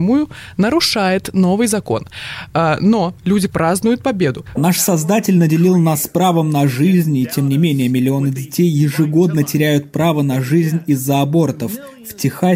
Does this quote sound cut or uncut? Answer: cut